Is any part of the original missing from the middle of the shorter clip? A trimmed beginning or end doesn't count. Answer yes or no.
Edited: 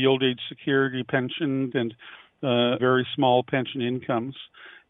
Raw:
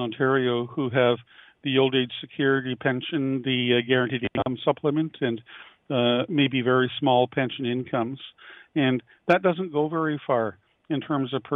yes